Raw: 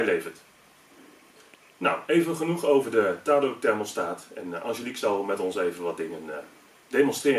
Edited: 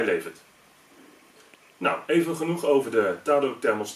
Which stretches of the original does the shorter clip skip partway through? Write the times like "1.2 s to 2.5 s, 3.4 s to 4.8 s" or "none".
none